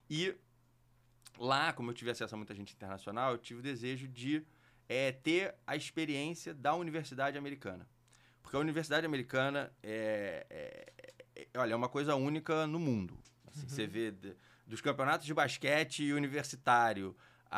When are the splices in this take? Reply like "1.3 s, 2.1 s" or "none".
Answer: none